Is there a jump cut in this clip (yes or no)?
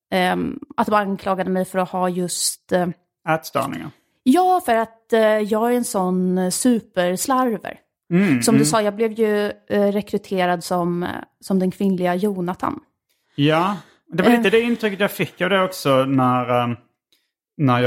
no